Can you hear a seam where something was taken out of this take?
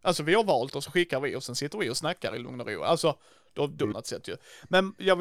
yes; 1 cut; at 3.9 s

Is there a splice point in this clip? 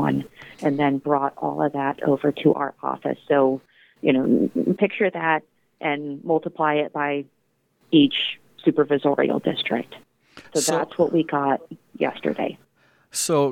no; 0 cuts

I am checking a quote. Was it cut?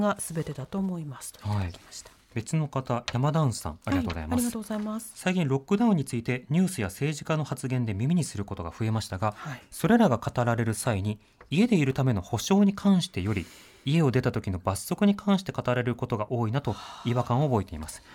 no; 0 cuts

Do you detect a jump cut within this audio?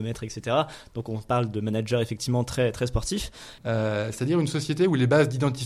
yes; 1 cut; at 3.6 s

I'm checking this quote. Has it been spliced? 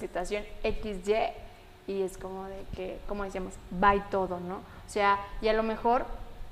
no; 0 cuts

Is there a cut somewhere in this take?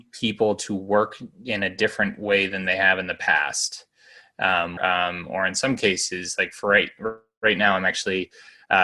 yes; 1 cut; at 4.8 s

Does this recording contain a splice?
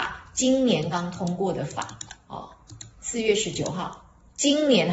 yes; 2 cuts; at 0.9 s, 2.9 s

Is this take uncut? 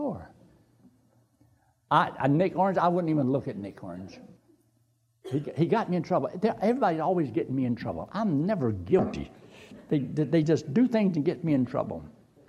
yes; 0 cuts

